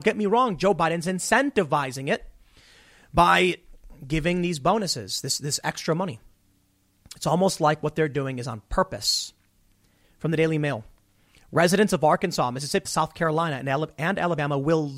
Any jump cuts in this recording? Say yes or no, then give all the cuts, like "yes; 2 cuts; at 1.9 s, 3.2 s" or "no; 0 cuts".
yes; 2 cuts; at 10.0 s, 12.8 s